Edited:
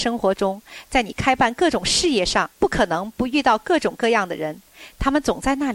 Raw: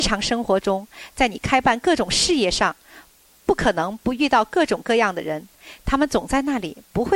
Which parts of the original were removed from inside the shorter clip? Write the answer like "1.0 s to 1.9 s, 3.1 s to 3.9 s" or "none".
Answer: 2.8 s to 3.4 s